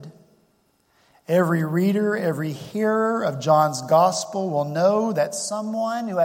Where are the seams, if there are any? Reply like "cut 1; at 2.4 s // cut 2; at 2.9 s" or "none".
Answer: none